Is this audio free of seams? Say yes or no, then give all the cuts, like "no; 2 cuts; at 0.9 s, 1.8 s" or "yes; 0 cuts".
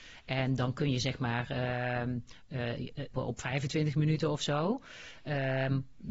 no; 1 cut; at 3.1 s